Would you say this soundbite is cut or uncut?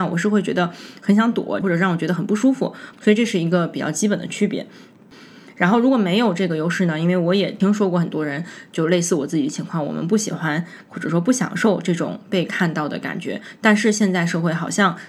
cut